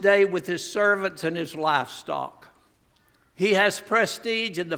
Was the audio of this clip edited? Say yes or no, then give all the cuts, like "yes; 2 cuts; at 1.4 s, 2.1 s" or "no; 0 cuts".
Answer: no; 0 cuts